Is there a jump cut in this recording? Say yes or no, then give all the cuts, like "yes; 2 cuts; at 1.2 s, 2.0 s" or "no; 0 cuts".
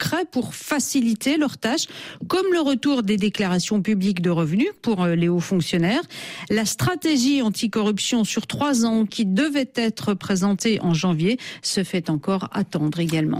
no; 0 cuts